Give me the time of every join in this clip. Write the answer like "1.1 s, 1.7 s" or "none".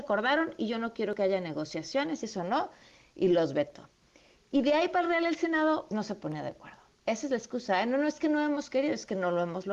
5.9 s

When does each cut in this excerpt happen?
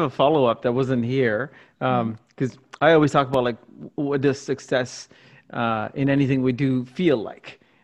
none

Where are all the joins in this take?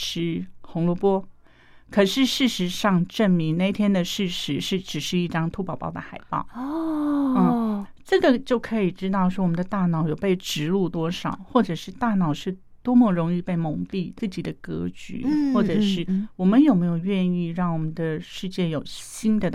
14.2 s

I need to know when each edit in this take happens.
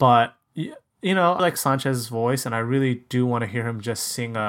1.4 s

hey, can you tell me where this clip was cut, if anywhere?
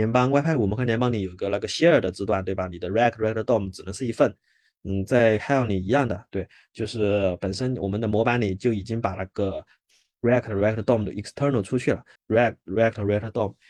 12.2 s

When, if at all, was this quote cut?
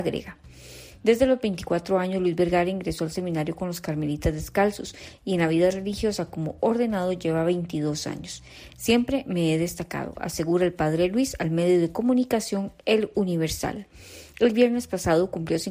8.7 s

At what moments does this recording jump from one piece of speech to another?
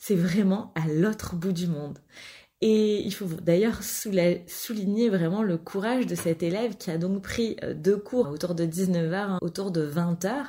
8.2 s, 9.4 s

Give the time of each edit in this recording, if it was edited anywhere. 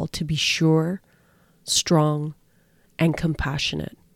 none

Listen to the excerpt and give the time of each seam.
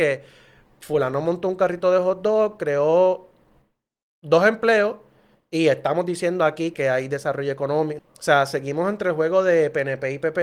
6.7 s, 8.0 s

